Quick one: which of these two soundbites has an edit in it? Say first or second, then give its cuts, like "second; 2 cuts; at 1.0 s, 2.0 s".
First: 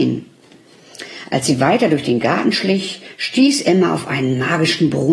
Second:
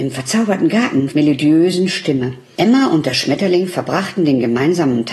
second; 2 cuts; at 1.1 s, 2.5 s